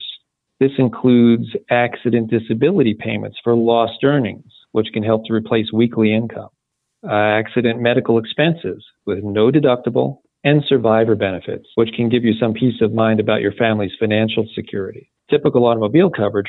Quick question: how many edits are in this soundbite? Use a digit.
3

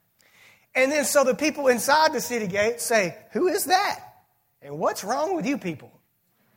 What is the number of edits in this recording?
0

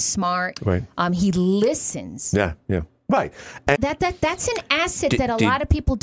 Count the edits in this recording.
1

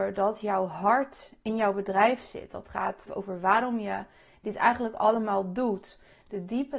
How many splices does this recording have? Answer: 1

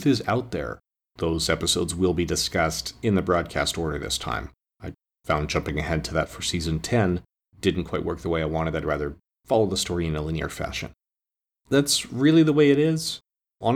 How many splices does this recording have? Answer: 1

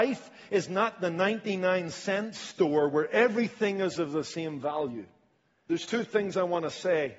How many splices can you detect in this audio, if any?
1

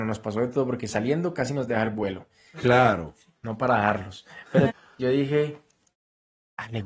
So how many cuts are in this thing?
2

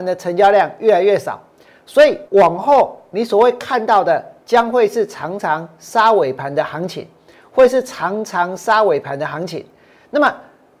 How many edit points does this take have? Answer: 1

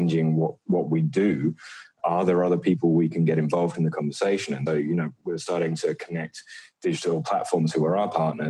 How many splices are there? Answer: 1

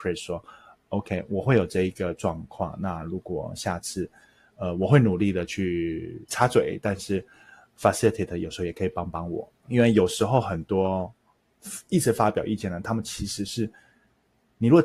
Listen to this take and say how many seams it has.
1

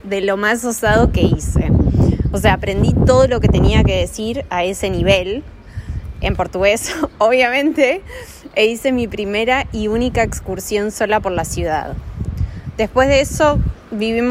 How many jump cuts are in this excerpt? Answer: 1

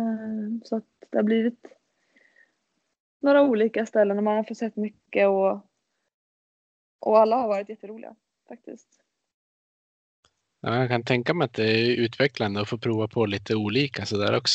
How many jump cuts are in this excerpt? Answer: 0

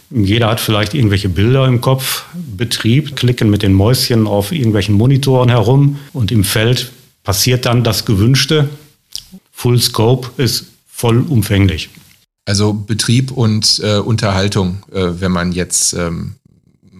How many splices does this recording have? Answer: 3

